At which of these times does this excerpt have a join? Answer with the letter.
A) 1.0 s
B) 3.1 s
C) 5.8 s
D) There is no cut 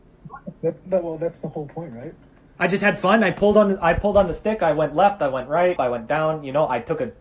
C